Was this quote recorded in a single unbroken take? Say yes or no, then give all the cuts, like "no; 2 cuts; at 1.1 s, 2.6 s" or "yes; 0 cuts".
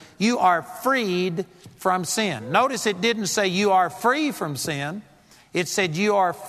yes; 0 cuts